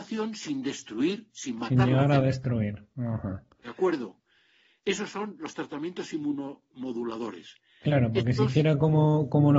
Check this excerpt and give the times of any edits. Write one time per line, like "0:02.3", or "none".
none